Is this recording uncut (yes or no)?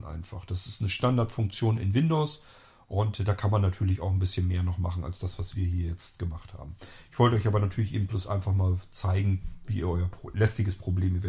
yes